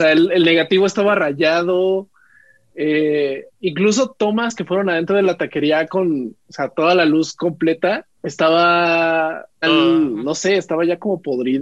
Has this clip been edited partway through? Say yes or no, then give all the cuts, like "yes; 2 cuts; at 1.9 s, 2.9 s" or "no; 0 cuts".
yes; 2 cuts; at 8.2 s, 9.6 s